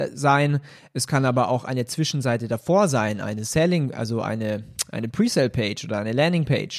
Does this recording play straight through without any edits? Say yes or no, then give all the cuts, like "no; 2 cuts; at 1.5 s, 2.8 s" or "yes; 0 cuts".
yes; 0 cuts